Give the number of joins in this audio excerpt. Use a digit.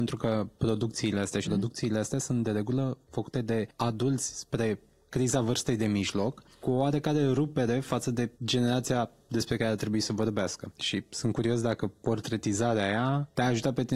2